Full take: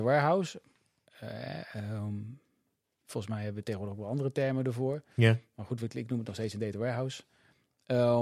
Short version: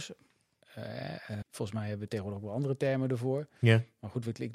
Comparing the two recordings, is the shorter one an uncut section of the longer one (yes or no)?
no